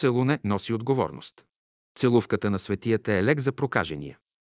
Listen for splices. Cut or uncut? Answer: uncut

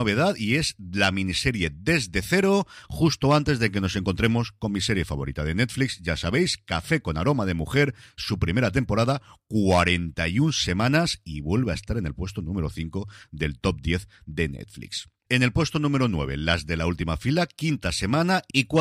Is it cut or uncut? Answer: cut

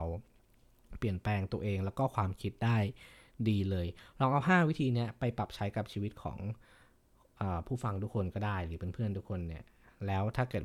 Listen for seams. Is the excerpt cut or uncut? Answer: uncut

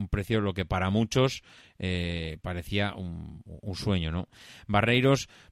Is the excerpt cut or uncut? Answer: uncut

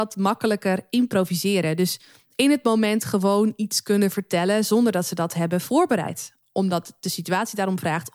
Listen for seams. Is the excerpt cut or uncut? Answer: uncut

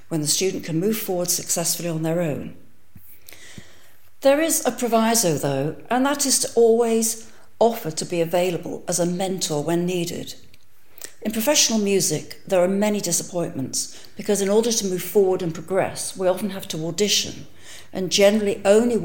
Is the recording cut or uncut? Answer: uncut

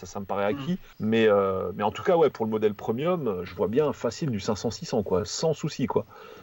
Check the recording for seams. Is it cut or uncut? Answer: cut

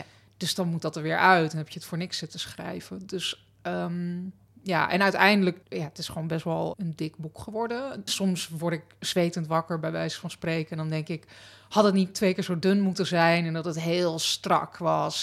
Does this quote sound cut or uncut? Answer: cut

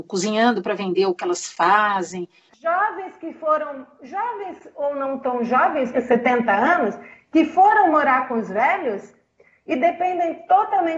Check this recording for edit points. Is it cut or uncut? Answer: cut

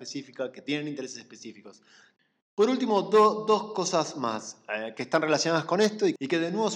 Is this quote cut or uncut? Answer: uncut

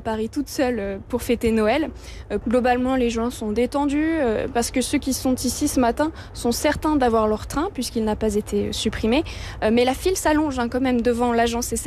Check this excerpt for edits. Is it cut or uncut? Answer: cut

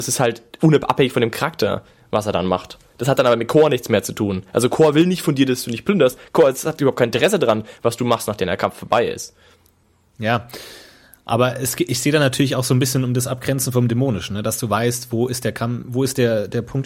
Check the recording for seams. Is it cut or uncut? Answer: uncut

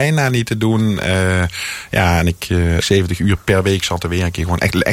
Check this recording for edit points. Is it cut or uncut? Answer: cut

